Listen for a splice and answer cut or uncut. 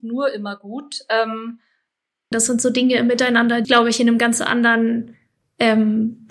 cut